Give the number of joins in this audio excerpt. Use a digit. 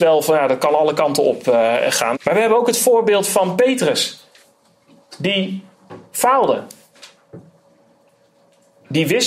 1